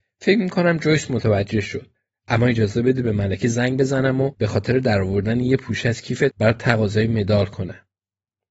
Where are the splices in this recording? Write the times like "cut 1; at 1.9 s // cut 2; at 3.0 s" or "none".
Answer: cut 1; at 2.1 s